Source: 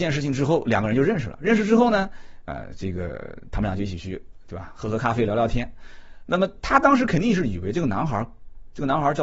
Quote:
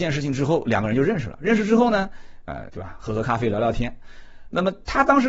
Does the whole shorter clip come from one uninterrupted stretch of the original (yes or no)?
no